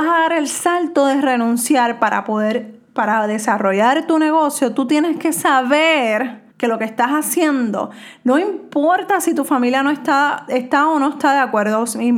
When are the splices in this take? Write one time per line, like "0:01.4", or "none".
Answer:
0:06.5